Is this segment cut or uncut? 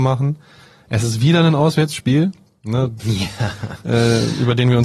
cut